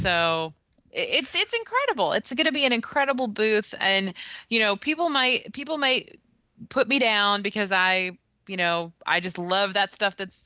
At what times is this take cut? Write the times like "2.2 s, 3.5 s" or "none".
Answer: none